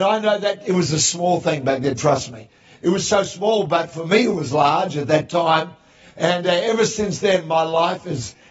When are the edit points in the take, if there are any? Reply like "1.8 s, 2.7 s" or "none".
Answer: none

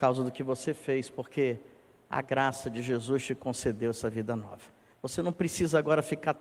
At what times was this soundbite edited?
4.9 s

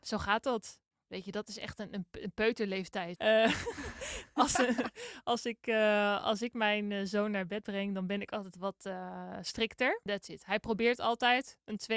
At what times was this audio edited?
3.2 s, 10.1 s

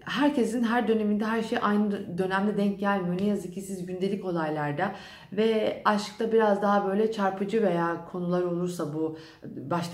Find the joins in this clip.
none

